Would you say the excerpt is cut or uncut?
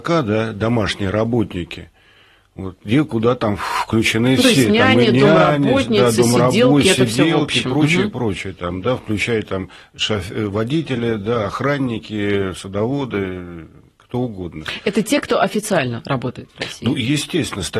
uncut